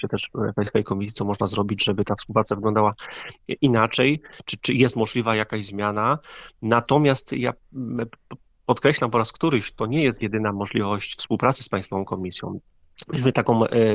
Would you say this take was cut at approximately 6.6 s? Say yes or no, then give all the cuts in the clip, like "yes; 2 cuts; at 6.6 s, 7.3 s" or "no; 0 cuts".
no; 0 cuts